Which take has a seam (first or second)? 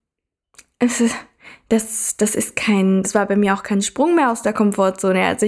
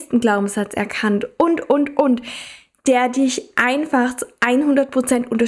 first